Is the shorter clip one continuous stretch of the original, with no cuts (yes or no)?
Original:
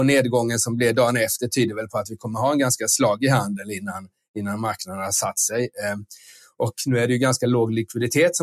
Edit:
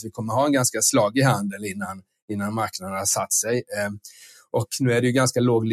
yes